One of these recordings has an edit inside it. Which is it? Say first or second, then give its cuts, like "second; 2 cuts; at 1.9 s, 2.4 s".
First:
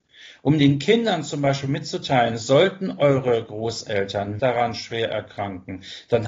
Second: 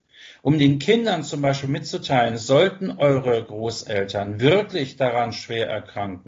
first; 1 cut; at 4.4 s